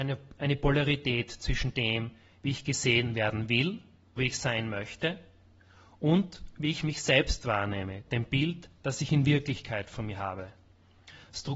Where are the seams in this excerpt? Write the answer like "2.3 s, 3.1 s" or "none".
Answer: 4.2 s